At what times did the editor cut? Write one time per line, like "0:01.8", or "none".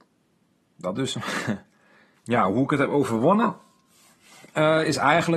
0:02.1